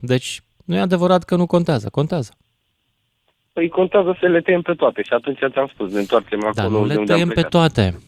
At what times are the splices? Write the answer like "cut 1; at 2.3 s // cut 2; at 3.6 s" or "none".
cut 1; at 4.2 s

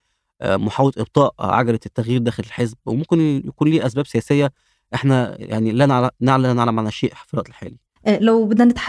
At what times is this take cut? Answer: cut 1; at 8.0 s

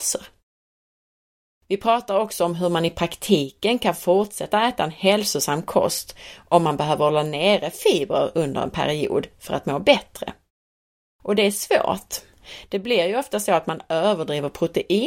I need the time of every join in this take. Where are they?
none

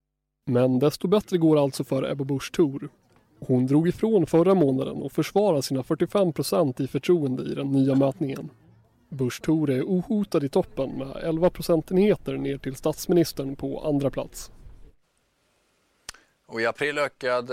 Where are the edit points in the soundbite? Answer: none

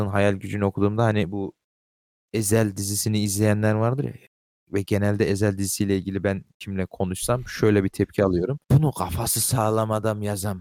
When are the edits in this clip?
cut 1; at 8.6 s

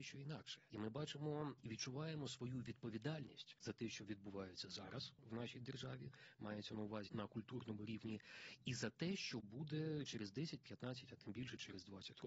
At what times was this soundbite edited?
cut 1; at 7.1 s

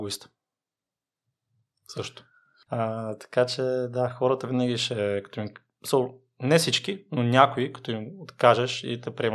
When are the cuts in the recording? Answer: cut 1; at 2.7 s

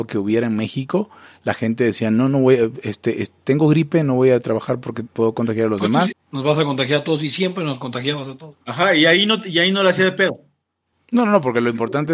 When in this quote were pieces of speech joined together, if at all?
cut 1; at 6.1 s // cut 2; at 8.6 s // cut 3; at 10.9 s

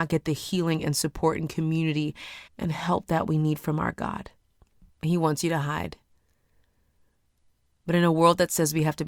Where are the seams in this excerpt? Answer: cut 1; at 2.5 s // cut 2; at 4.9 s

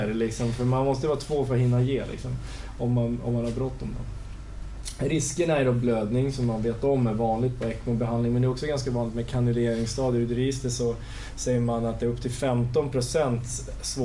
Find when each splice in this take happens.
none

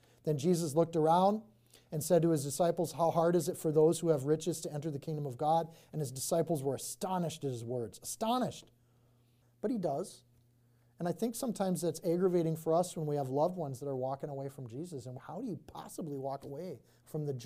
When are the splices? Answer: cut 1; at 9.4 s // cut 2; at 15.2 s

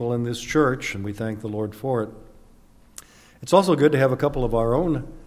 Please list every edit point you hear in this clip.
none

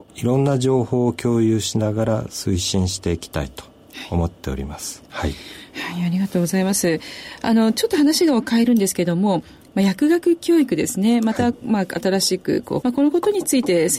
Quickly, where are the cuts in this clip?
cut 1; at 5.1 s // cut 2; at 12.8 s

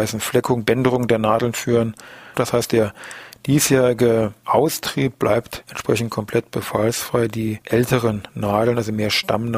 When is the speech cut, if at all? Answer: cut 1; at 2.3 s

